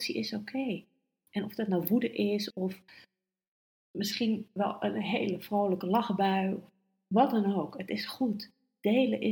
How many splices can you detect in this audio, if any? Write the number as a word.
one